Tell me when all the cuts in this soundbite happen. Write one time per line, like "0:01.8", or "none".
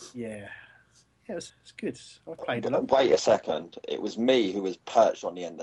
0:01.5